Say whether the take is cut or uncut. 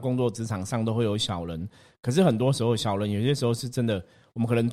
uncut